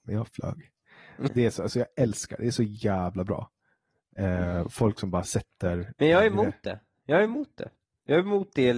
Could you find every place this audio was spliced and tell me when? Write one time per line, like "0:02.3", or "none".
0:01.3